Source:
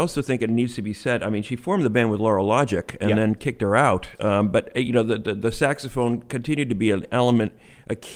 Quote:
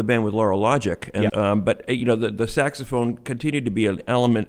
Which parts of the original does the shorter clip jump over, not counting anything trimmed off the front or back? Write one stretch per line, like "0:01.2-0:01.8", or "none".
0:03.2-0:04.2
0:05.2-0:05.4